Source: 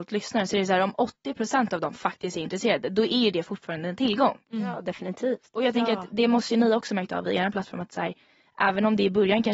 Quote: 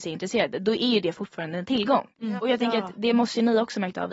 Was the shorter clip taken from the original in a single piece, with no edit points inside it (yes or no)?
no